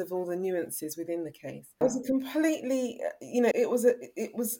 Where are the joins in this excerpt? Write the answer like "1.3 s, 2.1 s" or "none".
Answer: 1.8 s, 3.5 s